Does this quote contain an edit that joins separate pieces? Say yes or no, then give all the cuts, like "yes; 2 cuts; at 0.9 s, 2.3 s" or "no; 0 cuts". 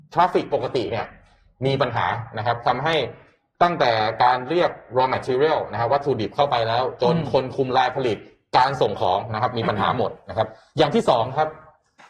no; 0 cuts